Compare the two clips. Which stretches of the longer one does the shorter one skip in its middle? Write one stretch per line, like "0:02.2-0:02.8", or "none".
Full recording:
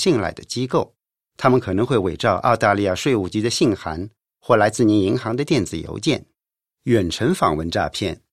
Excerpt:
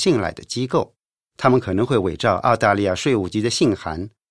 none